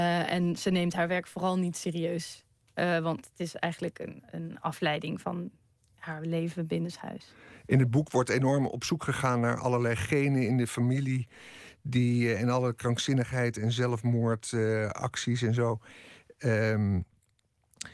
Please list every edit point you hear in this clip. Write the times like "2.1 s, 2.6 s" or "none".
none